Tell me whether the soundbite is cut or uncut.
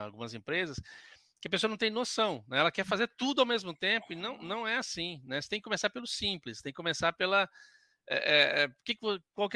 uncut